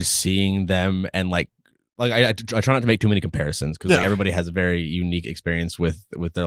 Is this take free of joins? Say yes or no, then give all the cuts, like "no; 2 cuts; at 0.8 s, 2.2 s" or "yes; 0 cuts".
yes; 0 cuts